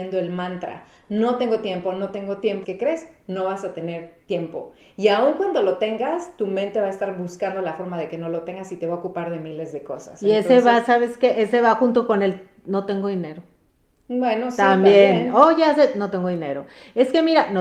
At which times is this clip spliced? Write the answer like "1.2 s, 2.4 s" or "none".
2.6 s